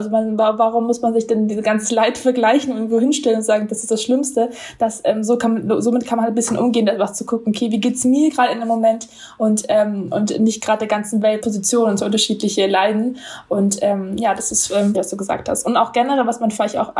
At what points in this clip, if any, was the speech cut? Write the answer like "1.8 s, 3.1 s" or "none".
11.4 s, 14.9 s